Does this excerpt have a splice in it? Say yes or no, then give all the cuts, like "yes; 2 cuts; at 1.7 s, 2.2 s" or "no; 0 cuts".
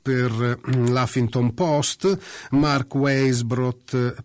no; 0 cuts